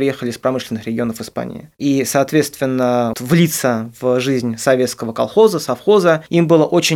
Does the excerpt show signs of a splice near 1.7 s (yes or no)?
no